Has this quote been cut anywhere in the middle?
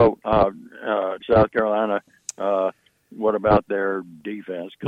yes; 1 cut; at 1.2 s

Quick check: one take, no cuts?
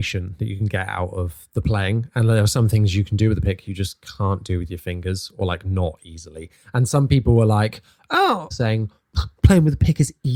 no; 1 cut; at 8.5 s

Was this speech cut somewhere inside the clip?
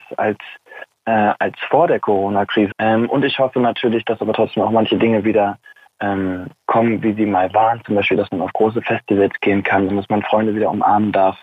yes; 2 cuts; at 2.7 s, 9.9 s

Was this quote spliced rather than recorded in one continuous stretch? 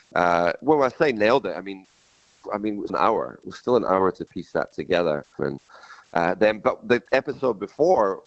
yes; 2 cuts; at 2.9 s, 5.4 s

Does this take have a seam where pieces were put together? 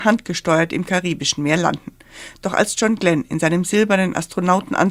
no; 0 cuts

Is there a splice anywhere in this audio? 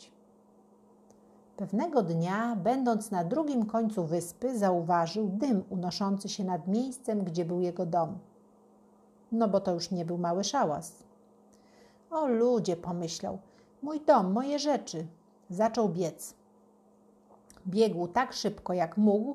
no; 0 cuts

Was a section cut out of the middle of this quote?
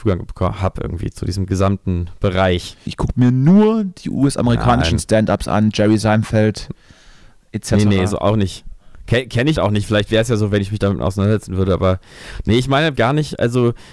yes; 3 cuts; at 2.9 s, 9.5 s, 12.9 s

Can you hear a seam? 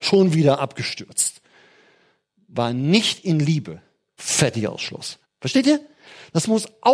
yes; 2 cuts; at 4.2 s, 5.2 s

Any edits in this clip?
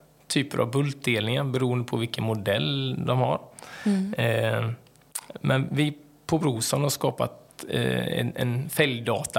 no; 0 cuts

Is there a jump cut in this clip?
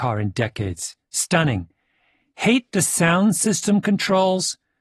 no; 0 cuts

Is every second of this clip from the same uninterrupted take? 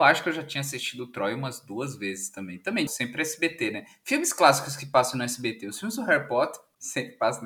no; 1 cut; at 2.9 s

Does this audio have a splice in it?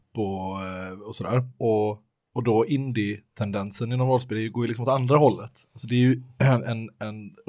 no; 0 cuts

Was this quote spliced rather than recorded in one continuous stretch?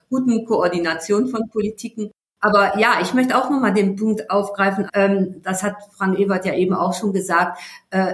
yes; 1 cut; at 4.9 s

